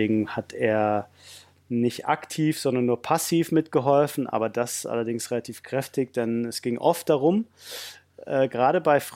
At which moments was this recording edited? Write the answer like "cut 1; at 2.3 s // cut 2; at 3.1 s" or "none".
none